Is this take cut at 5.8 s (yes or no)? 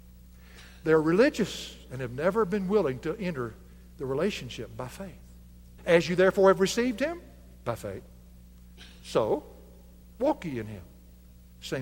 yes